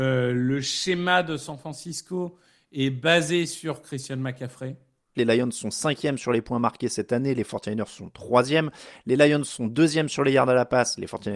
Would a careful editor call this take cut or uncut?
cut